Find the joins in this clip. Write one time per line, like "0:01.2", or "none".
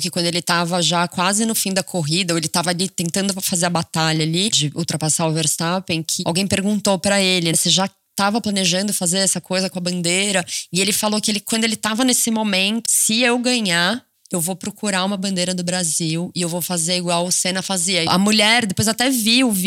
0:07.5
0:12.9
0:18.1